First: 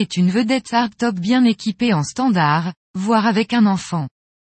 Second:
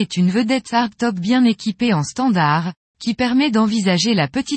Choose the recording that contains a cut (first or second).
first